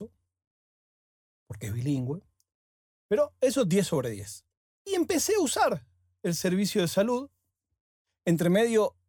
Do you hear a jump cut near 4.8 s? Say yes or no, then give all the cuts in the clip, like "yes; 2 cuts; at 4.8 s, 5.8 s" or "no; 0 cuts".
no; 0 cuts